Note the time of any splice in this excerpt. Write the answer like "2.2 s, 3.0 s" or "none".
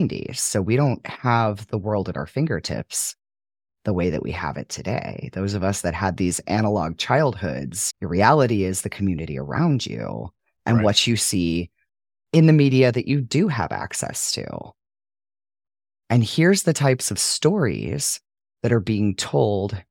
none